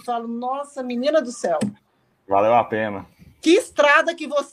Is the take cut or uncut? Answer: uncut